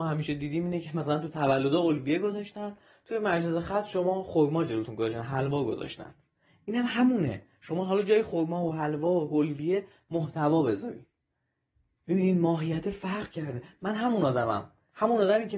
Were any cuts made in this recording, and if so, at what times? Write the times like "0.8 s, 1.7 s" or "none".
none